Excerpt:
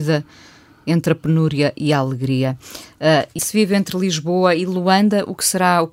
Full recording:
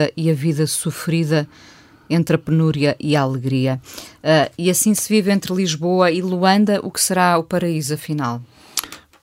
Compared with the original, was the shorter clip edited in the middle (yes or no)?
yes